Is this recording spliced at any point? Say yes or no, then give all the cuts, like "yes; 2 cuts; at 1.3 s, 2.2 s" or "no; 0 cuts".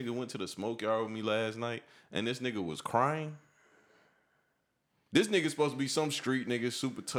no; 0 cuts